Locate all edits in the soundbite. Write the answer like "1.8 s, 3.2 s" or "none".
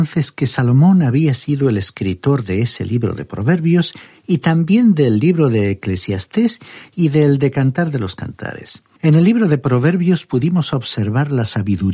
9.0 s